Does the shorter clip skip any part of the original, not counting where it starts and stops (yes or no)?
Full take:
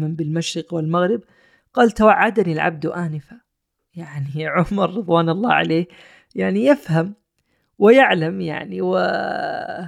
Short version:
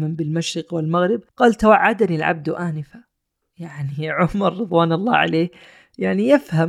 yes